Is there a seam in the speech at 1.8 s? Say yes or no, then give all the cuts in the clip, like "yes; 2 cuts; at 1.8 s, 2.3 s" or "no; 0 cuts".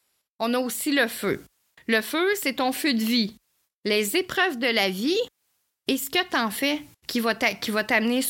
no; 2 cuts; at 3.7 s, 6.9 s